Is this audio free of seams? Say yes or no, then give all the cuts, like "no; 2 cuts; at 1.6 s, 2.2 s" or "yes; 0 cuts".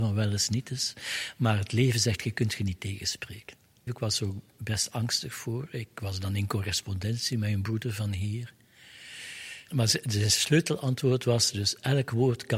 no; 2 cuts; at 3.9 s, 9.7 s